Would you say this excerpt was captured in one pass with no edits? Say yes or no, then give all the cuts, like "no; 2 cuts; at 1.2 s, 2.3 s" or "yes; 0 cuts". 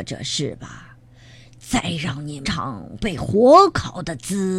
no; 1 cut; at 2.4 s